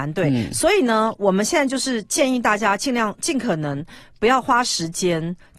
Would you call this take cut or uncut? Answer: uncut